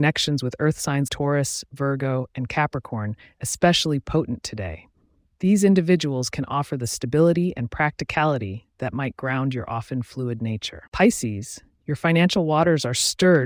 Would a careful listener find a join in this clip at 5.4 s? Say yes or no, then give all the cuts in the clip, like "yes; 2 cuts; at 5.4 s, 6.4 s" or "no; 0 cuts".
no; 2 cuts; at 1.1 s, 10.9 s